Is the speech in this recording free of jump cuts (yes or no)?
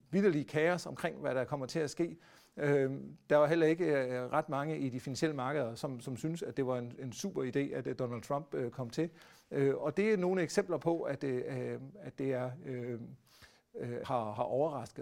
no